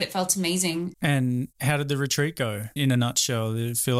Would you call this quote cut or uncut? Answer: cut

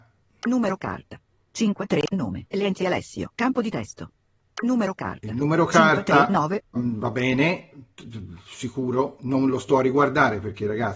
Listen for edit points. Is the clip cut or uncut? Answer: cut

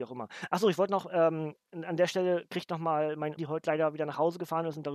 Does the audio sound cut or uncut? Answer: cut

